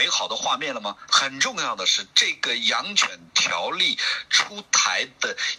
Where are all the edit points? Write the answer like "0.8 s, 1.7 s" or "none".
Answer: 1.1 s